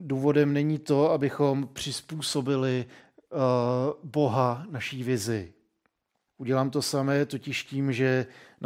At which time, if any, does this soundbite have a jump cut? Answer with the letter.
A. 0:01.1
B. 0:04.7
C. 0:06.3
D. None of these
C